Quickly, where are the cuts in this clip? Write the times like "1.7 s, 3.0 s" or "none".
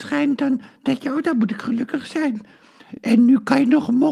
none

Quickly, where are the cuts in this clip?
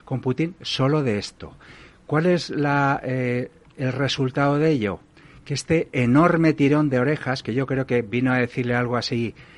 none

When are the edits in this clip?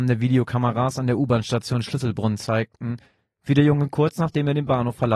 none

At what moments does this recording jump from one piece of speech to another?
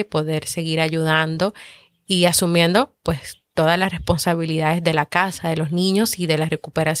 none

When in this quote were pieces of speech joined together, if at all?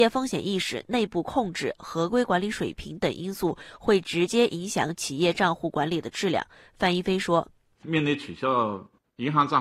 none

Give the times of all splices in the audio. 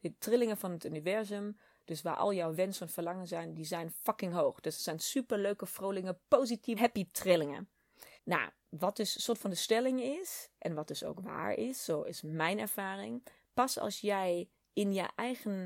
6.8 s, 8.2 s

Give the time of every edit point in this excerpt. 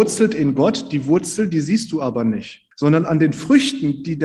2.7 s

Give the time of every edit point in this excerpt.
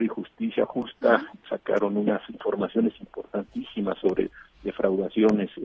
none

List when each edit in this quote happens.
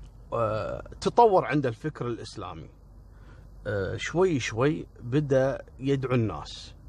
5.7 s

